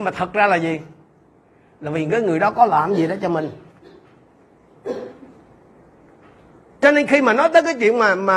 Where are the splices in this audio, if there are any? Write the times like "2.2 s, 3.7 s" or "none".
none